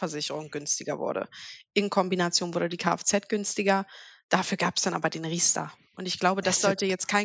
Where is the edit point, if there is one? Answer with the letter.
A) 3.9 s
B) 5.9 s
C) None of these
C